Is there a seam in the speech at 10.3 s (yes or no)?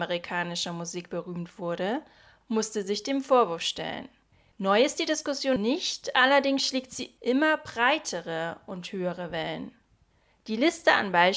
no